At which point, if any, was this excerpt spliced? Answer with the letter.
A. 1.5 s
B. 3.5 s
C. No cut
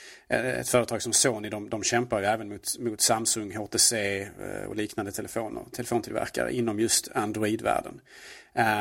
C